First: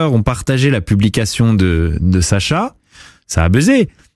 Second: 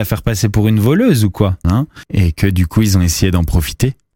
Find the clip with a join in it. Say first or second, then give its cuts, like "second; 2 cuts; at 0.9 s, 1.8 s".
second; 1 cut; at 1.6 s